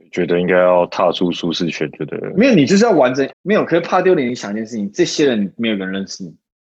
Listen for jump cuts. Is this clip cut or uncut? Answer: cut